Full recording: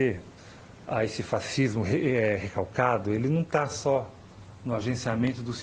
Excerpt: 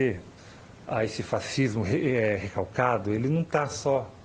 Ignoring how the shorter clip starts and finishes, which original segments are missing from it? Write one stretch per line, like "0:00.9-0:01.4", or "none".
none